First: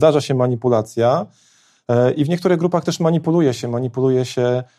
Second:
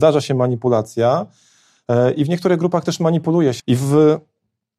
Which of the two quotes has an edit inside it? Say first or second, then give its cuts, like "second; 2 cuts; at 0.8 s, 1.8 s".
second; 1 cut; at 3.6 s